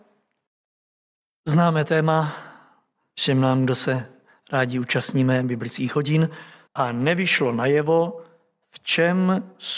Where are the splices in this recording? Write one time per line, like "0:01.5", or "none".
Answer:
0:06.7